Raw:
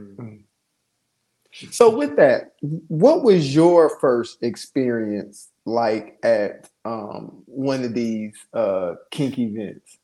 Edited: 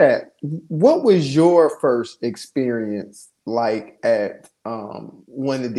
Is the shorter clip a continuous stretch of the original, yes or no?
yes